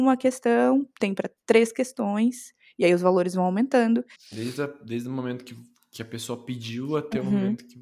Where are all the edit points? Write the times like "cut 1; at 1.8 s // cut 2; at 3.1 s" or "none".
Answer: cut 1; at 4.2 s